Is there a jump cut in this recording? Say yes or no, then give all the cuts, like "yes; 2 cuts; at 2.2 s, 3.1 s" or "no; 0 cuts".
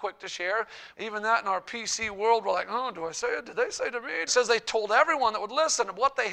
yes; 2 cuts; at 0.9 s, 4.3 s